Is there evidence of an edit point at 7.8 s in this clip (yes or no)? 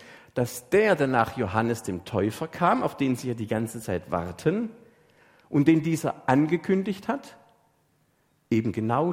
no